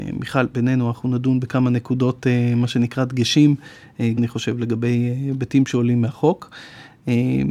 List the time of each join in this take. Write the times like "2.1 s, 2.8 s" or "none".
4.2 s